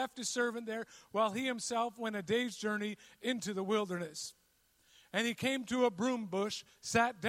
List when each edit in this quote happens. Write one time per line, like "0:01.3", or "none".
none